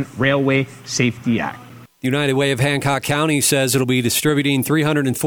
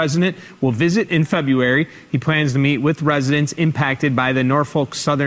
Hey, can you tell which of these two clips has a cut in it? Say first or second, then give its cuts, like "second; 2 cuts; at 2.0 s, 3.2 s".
first; 1 cut; at 1.9 s